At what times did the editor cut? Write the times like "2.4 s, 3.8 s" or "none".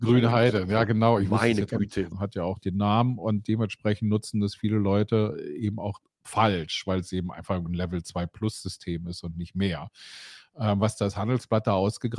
2.1 s

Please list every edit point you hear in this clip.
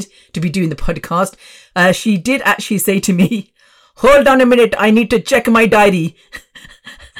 none

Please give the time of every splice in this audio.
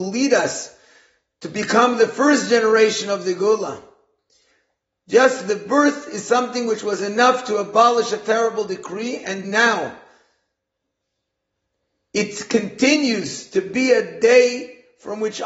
9.4 s

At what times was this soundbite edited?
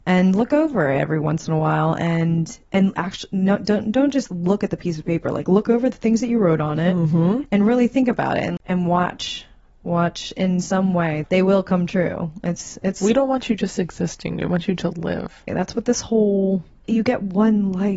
15.5 s, 16.8 s

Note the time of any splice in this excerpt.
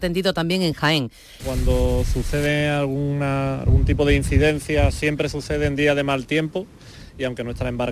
1.4 s

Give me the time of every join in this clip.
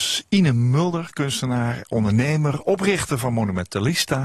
none

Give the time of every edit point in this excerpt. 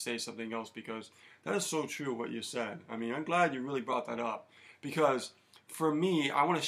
none

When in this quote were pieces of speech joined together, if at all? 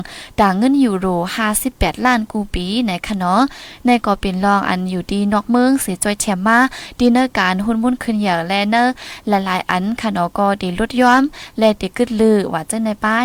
none

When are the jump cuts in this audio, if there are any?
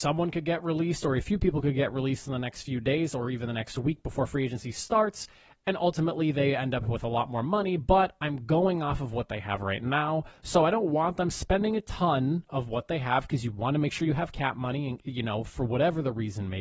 none

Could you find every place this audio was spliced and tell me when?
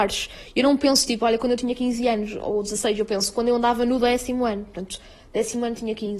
none

